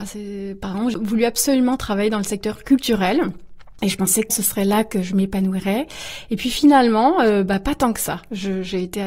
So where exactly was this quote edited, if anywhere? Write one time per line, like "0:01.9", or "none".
0:04.3